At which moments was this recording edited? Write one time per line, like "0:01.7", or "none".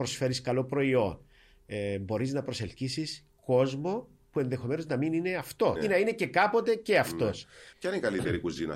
0:05.8
0:07.7